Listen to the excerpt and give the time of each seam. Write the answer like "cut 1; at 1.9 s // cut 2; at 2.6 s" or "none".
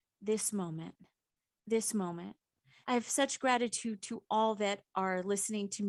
cut 1; at 2.8 s